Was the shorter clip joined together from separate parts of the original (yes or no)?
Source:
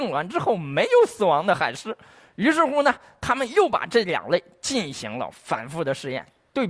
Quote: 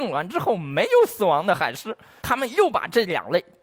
yes